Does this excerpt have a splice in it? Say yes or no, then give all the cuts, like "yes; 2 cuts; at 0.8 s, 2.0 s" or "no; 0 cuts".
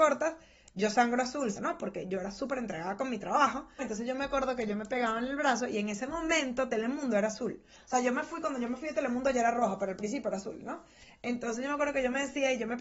yes; 2 cuts; at 1.6 s, 3.8 s